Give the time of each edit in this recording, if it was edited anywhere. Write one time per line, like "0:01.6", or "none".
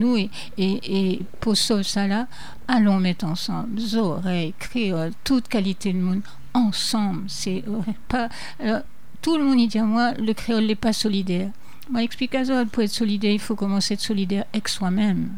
0:01.2